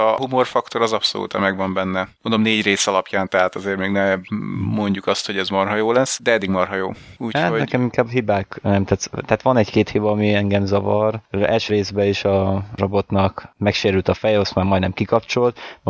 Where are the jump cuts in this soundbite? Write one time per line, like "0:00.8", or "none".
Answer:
none

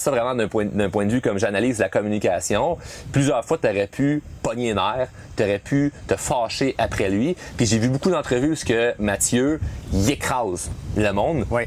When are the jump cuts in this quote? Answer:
none

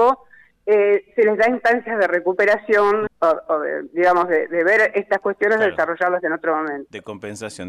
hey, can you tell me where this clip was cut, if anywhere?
0:03.1

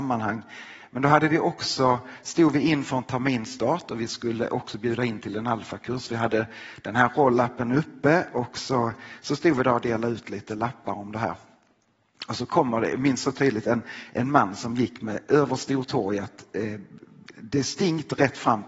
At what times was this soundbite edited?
none

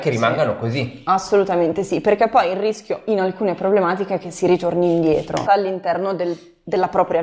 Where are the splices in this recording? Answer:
0:05.5

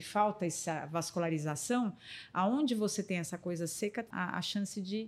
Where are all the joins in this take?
0:04.1

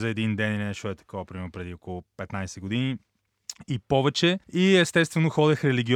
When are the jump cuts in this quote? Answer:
0:04.4

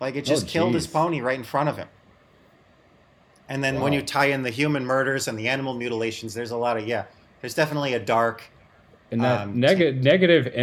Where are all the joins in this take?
none

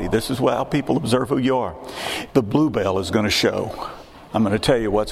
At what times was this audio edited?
0:02.3

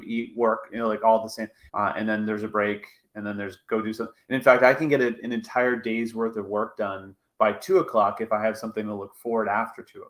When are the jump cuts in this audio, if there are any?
0:01.7

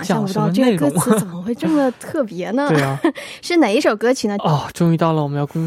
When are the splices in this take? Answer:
0:04.4

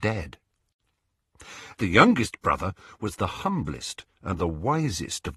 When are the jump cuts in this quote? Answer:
0:01.8
0:04.4

